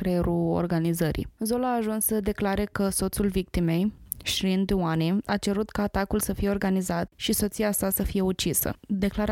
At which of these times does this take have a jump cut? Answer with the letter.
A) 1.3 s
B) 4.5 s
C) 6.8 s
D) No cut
D